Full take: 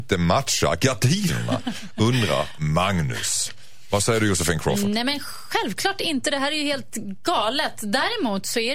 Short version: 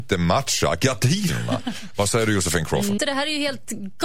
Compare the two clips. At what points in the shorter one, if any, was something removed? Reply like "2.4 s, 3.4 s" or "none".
1.9 s, 3.0 s

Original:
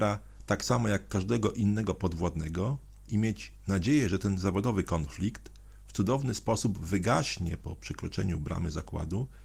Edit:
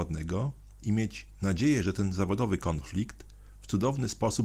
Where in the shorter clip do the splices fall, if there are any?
none

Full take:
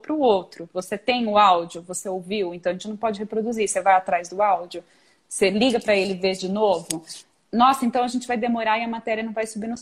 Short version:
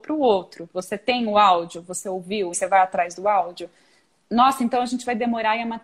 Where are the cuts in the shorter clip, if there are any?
2.5 s, 4.1 s

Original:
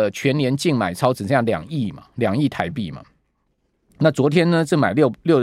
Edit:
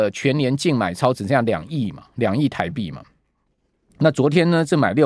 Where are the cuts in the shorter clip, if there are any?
none

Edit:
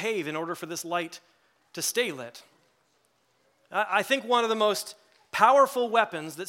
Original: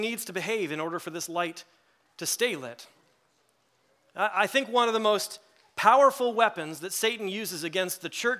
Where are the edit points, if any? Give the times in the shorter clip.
none

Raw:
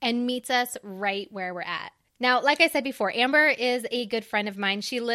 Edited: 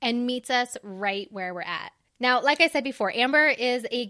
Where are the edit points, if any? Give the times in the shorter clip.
none

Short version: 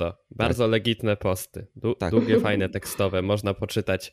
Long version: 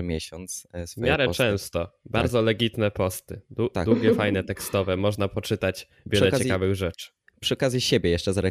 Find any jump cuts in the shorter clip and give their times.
none

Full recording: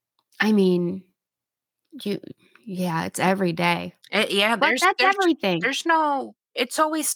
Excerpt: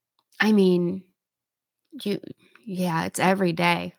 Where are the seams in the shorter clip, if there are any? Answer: none

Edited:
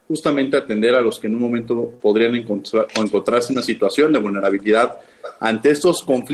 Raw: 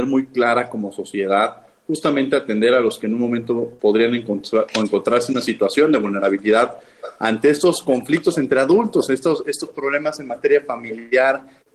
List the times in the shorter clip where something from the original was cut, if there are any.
none

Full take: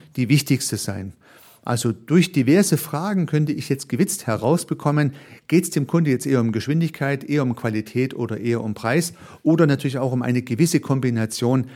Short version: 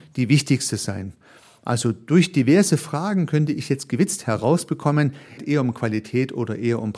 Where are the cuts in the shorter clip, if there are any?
5.4 s

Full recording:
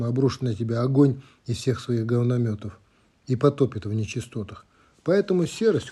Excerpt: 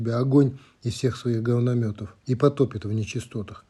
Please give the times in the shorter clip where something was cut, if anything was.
2.2 s

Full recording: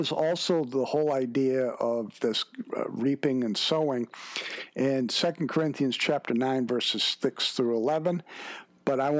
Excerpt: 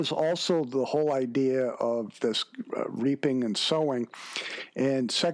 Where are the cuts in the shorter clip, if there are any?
none

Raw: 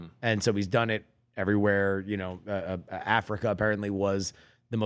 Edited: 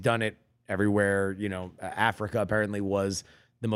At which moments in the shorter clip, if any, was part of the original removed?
1.7 s

